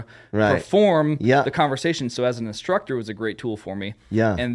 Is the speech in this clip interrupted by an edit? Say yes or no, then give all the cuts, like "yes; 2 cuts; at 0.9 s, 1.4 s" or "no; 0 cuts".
no; 0 cuts